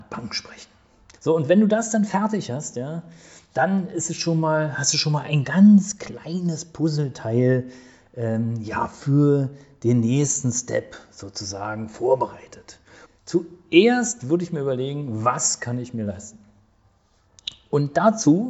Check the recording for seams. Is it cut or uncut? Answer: cut